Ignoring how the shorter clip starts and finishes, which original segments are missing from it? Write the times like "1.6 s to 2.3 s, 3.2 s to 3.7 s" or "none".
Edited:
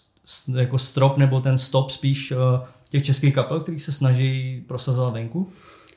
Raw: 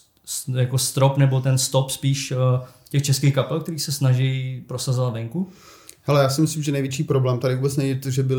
none